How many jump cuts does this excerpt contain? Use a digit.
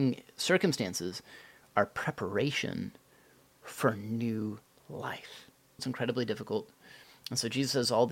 1